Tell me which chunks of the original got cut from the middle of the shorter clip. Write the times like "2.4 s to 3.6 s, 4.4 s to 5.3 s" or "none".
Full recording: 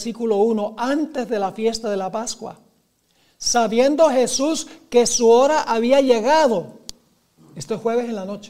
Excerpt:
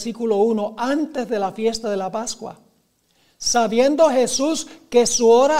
none